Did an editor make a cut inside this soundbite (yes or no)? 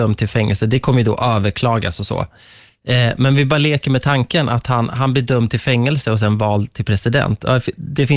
no